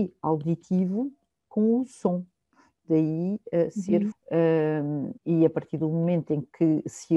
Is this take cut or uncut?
cut